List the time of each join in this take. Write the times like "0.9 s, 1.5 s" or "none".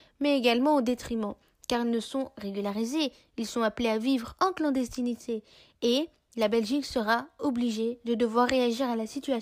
none